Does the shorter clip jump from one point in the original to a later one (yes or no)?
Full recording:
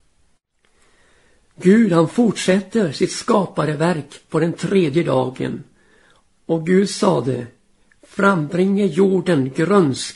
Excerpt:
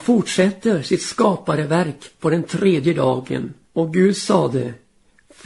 yes